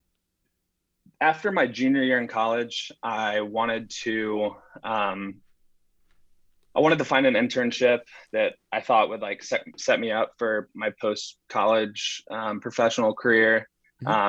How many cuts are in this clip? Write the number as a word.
zero